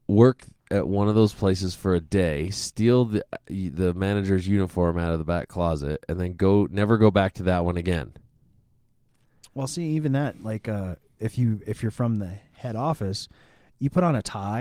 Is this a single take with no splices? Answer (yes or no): yes